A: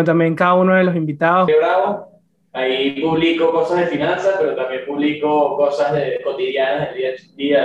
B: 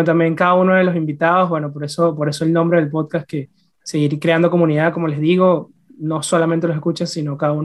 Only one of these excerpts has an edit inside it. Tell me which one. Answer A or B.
A